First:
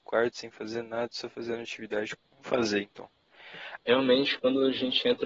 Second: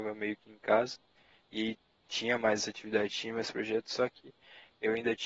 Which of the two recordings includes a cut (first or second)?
first